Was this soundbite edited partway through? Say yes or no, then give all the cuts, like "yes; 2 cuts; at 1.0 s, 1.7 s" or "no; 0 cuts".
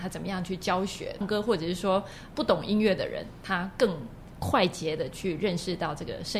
yes; 2 cuts; at 1.2 s, 2.3 s